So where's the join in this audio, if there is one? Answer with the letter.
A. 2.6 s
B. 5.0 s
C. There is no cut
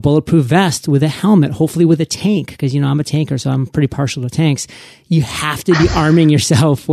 C